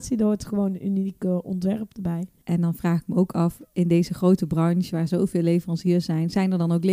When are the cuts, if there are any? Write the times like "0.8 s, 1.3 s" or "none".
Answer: none